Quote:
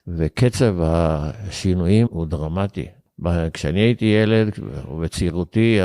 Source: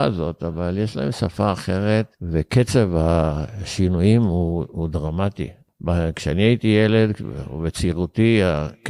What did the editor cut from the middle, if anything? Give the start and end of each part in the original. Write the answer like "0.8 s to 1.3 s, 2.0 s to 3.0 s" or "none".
4.2 s to 4.7 s